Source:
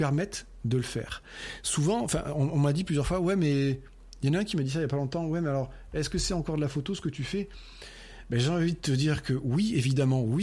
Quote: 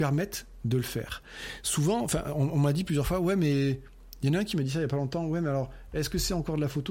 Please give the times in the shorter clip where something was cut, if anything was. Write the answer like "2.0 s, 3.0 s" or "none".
none